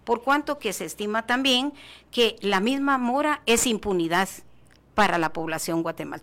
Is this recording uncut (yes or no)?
yes